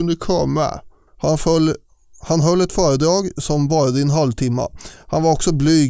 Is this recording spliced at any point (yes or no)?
yes